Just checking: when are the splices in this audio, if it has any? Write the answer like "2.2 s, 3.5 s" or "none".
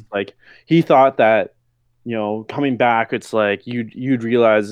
none